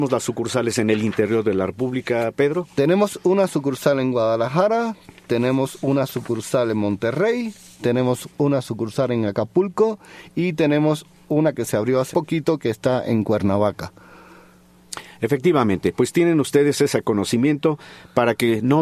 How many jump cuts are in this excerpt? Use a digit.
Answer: 1